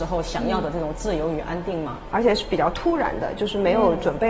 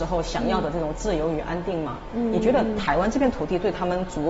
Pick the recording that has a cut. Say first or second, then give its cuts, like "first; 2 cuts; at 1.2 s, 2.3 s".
first; 1 cut; at 2.1 s